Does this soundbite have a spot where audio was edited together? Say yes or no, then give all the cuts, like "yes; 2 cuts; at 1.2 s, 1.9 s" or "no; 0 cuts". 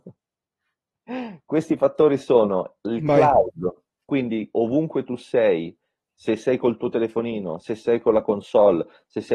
no; 0 cuts